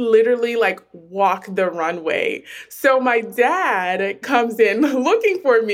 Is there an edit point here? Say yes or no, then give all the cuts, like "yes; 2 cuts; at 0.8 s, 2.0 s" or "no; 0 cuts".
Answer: no; 0 cuts